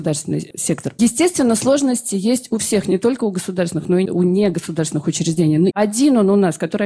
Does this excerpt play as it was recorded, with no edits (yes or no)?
no